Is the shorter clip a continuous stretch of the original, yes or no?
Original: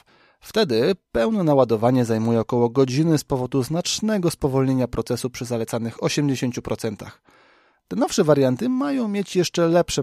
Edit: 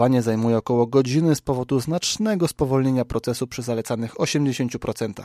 yes